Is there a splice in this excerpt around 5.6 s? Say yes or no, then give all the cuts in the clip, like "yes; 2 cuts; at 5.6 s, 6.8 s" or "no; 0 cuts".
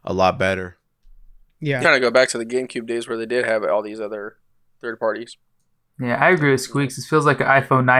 no; 1 cut; at 1.8 s